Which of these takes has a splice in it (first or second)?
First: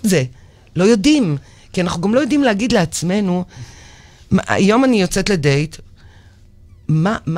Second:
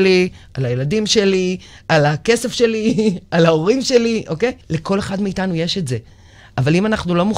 second